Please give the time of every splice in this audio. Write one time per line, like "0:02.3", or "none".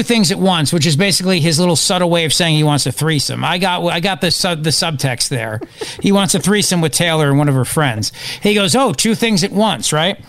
none

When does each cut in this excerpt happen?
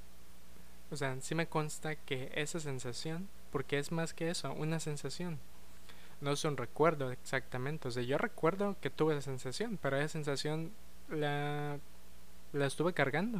none

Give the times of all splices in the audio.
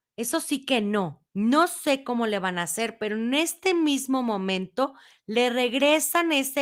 0:01.3

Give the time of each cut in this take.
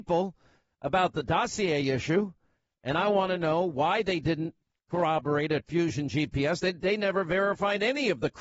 none

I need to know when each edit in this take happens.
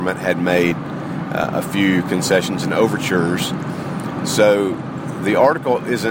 none

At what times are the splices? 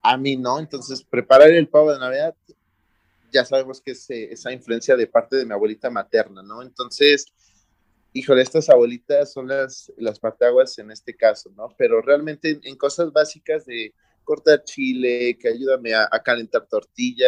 none

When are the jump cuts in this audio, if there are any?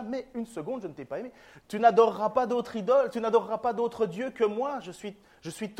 0:01.6

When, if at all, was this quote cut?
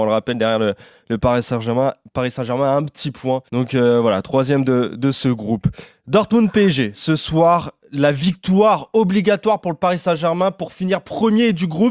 0:03.5
0:06.9

